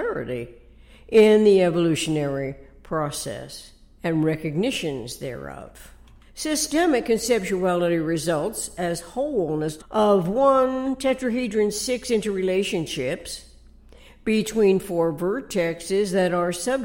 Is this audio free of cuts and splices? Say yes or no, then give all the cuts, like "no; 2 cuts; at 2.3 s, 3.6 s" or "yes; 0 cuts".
no; 1 cut; at 9.8 s